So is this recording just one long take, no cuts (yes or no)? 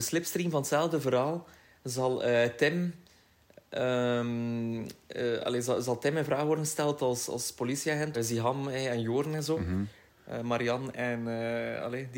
no